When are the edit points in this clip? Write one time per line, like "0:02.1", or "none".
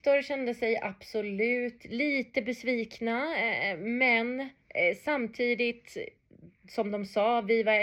0:04.6